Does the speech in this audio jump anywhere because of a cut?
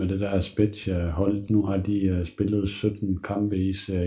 no; 0 cuts

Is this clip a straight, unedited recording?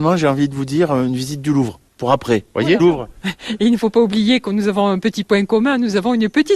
no; 1 cut; at 2.8 s

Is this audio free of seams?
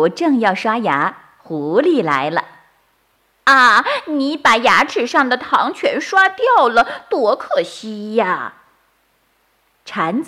yes; 0 cuts

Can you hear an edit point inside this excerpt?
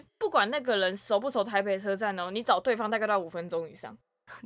no; 0 cuts

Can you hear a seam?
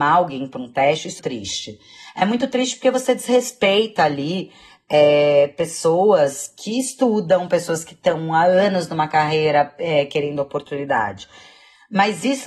yes; 1 cut; at 1.2 s

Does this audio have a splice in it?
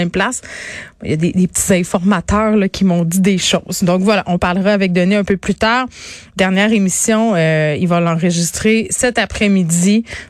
no; 0 cuts

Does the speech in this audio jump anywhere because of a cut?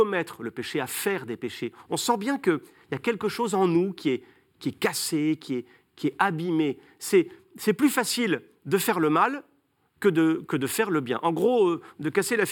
no; 0 cuts

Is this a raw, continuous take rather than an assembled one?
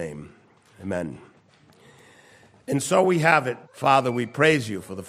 no; 1 cut; at 3.6 s

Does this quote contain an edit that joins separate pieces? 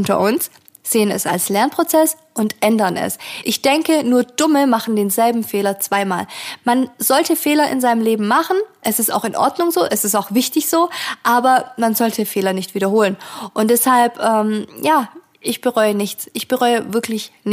no; 0 cuts

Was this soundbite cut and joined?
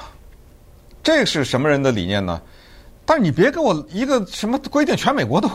yes; 1 cut; at 3.0 s

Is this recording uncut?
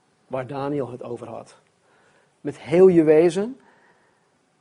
no; 1 cut; at 2.3 s

